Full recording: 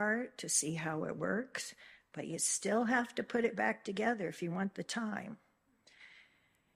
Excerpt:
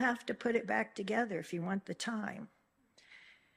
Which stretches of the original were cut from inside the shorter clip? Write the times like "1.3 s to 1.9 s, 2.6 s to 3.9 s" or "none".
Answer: none